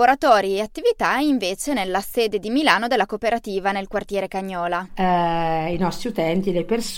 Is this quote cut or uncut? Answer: cut